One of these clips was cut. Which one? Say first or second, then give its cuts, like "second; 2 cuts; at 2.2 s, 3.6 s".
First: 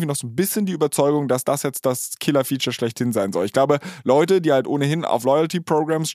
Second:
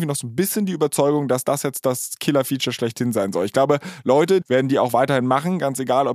second; 1 cut; at 4.4 s